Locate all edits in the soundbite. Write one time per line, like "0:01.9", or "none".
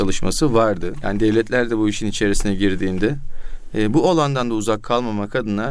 0:01.0